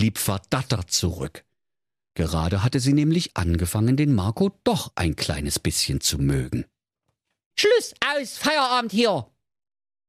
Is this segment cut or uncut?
cut